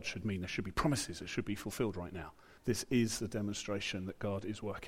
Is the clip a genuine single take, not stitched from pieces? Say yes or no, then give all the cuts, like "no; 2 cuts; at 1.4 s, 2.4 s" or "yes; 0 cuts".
no; 1 cut; at 2.6 s